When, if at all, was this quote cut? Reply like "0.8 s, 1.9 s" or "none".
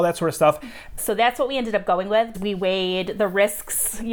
1.0 s, 2.3 s